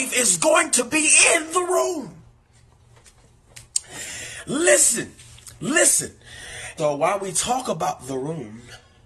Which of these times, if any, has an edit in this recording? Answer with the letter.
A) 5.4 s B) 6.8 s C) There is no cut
B